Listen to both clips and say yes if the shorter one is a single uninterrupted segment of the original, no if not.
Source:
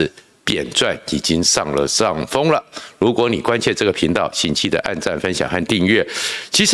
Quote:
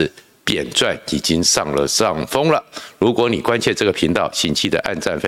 yes